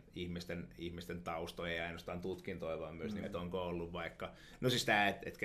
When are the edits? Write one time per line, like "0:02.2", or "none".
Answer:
0:03.2